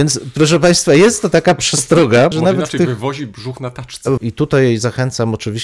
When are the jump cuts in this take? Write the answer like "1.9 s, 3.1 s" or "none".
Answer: 2.3 s, 4.2 s